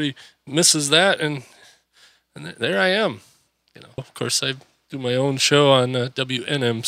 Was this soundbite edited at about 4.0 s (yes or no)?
yes